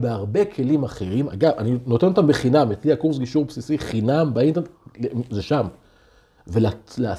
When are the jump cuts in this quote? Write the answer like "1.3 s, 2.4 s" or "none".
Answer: none